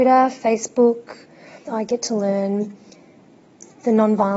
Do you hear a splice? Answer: yes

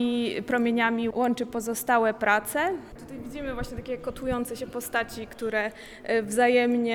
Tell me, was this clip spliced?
yes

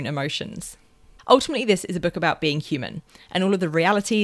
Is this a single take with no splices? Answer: no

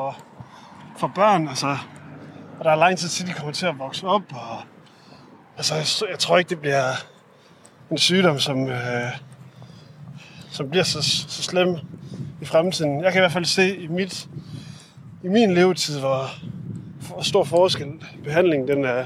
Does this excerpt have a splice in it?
no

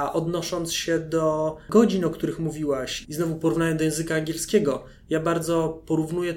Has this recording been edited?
yes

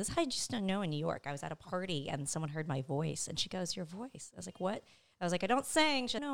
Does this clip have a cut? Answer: no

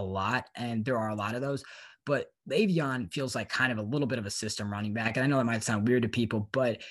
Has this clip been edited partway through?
no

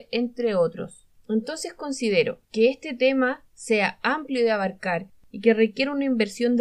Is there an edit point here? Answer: yes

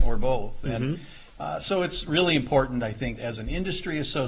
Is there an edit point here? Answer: yes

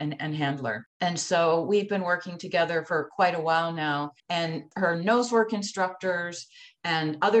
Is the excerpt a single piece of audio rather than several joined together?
no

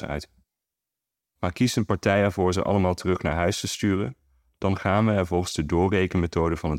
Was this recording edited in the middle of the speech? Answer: yes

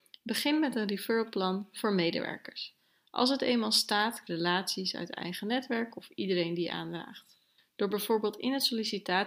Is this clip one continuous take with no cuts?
no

